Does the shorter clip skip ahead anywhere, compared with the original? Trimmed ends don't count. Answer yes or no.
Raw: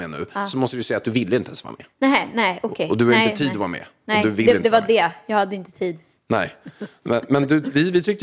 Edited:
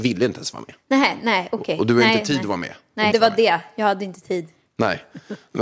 yes